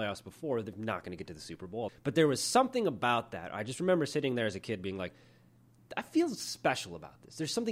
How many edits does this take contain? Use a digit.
1